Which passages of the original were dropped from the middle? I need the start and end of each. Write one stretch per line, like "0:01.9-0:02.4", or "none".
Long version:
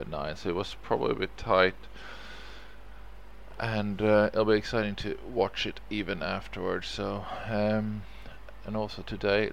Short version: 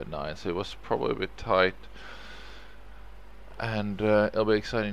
none